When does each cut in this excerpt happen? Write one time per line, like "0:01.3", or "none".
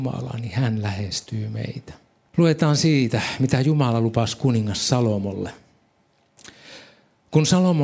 0:02.3

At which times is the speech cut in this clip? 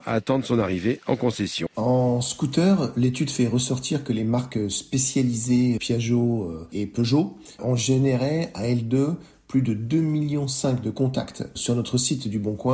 0:01.7
0:07.6

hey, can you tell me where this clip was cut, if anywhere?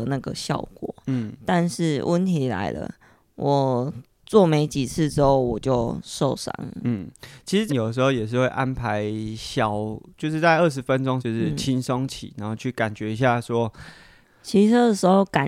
0:07.7
0:11.2
0:14.2

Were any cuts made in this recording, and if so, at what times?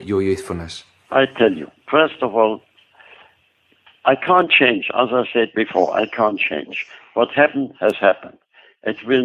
none

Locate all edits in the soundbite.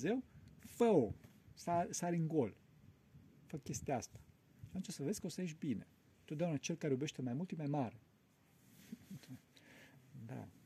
none

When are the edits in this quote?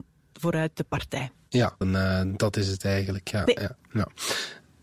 0:01.8

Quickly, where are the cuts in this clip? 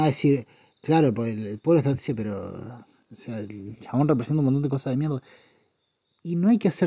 0:02.1

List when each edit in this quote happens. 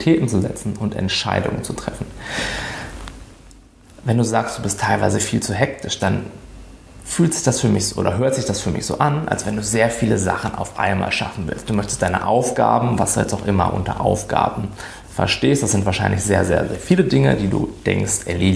0:15.0

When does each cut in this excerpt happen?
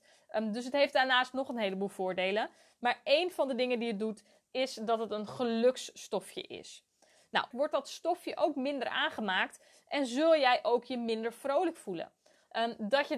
0:07.5

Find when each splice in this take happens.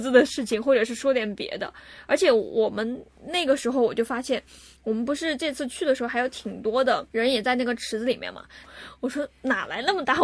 0:07.1
0:08.7

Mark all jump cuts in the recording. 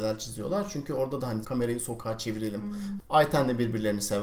0:01.4
0:03.0

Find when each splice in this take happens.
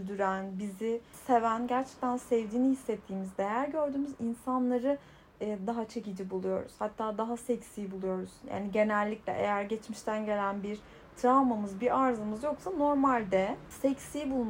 none

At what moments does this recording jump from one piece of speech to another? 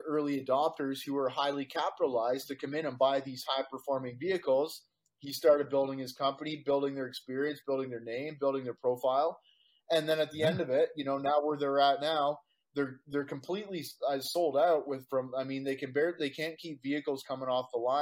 none

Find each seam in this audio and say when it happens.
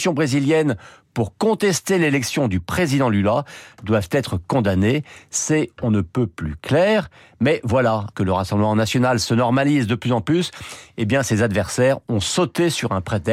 0:08.1

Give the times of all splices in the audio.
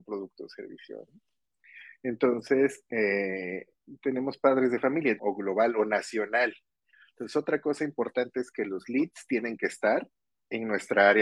0:05.2

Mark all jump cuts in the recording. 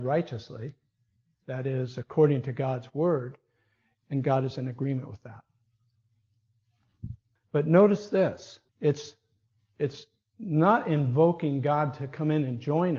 0:07.4
0:08.7

